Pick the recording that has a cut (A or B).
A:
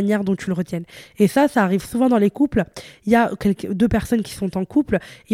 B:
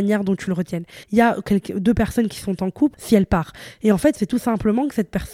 B